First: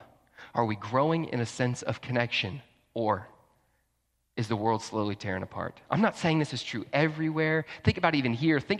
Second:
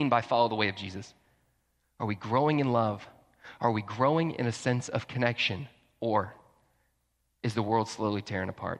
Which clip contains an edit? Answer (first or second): second